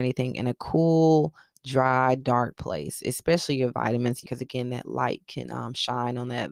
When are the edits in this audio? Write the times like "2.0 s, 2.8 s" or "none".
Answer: 4.2 s